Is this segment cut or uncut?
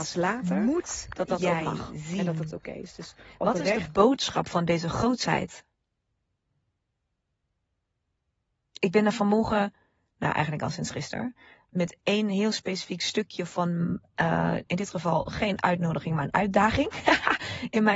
uncut